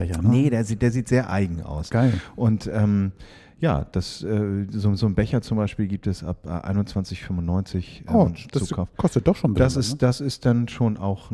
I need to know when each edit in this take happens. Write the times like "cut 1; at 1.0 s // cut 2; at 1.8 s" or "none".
none

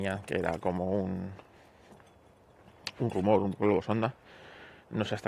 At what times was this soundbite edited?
none

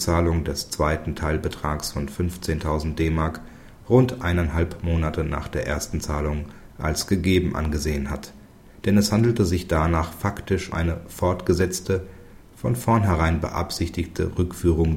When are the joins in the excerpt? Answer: cut 1; at 10.7 s

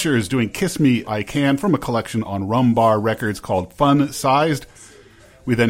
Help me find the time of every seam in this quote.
cut 1; at 1.0 s

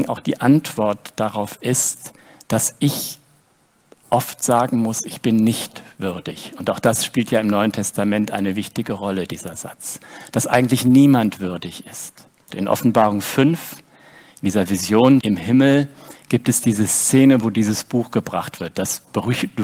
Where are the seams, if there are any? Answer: cut 1; at 12.5 s // cut 2; at 15.2 s

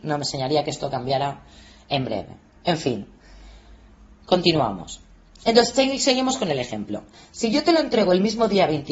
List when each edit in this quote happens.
none

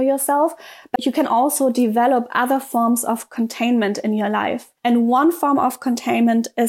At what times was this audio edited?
cut 1; at 4.8 s

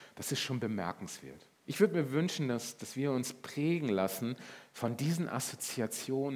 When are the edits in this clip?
cut 1; at 1.5 s

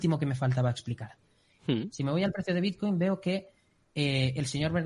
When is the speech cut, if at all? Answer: cut 1; at 1.6 s

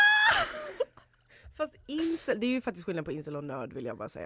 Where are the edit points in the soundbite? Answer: none

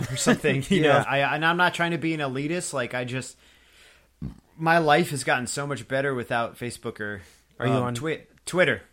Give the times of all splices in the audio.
cut 1; at 1.0 s

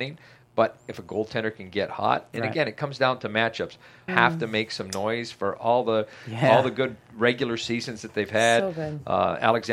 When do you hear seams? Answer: cut 1; at 4.1 s

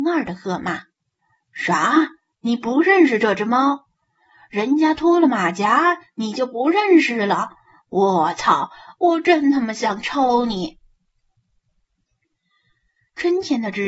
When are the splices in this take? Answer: none

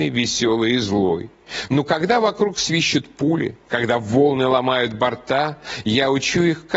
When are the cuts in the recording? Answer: cut 1; at 1.7 s

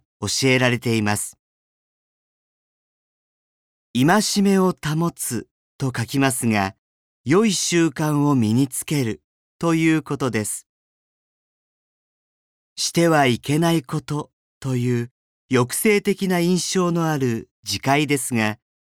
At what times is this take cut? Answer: cut 1; at 7.0 s

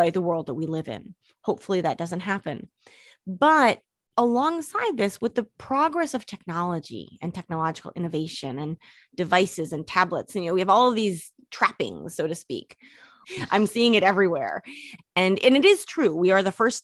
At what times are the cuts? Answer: cut 1; at 13.2 s // cut 2; at 15.0 s

